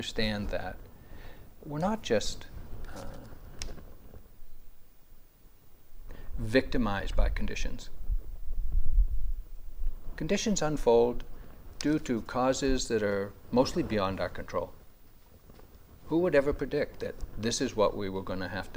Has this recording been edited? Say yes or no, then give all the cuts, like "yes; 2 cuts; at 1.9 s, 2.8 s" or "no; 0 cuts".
yes; 1 cut; at 1.6 s